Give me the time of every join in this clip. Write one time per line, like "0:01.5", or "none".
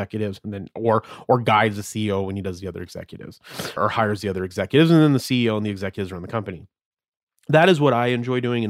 0:03.8